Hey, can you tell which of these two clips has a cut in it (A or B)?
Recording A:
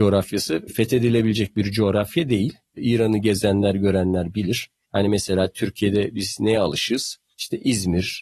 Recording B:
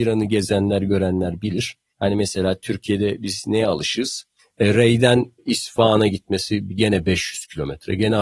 B